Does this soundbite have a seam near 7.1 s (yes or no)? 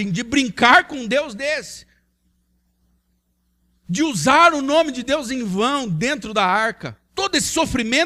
yes